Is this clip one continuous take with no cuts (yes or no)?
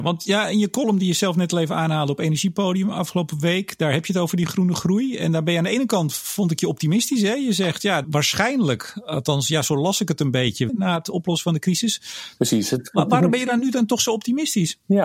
no